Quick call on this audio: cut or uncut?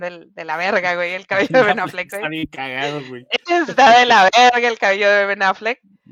uncut